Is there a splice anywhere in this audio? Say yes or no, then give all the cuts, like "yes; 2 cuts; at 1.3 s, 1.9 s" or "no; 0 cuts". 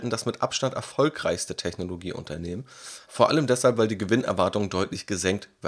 yes; 1 cut; at 3.0 s